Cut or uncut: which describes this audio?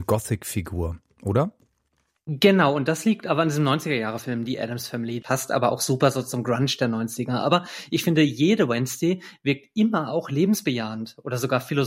cut